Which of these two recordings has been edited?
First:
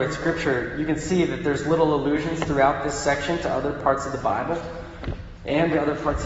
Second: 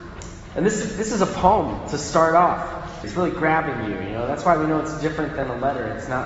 second; 1 cut; at 3.0 s

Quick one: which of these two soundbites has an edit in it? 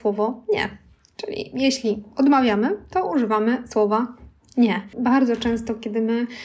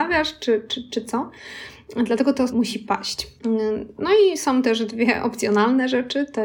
second; 1 cut; at 2.5 s

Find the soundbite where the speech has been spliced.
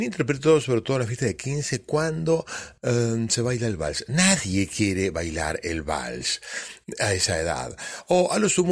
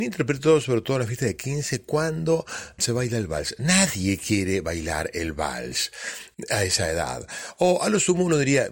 second; 1 cut; at 2.8 s

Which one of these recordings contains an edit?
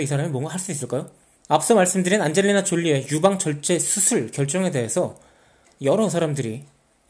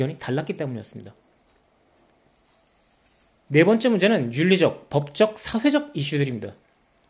first; 1 cut; at 1.4 s

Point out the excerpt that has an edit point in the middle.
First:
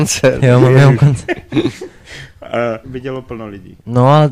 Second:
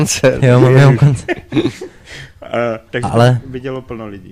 first; 1 cut; at 2.8 s

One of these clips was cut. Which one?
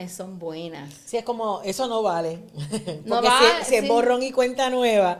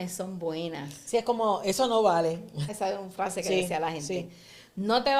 second; 1 cut; at 2.7 s

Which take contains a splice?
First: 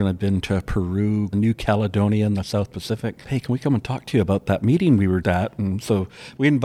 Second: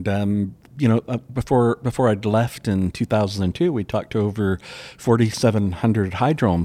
first; 3 cuts; at 1.3 s, 3.2 s, 5.2 s

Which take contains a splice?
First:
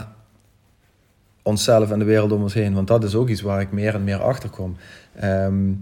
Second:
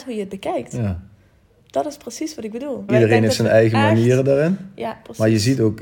second; 1 cut; at 2.9 s

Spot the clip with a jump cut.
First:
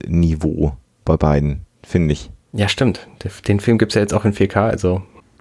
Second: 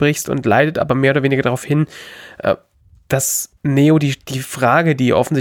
second; 1 cut; at 3.6 s

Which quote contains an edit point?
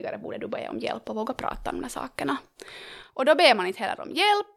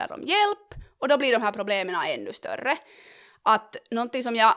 first; 1 cut; at 3.1 s

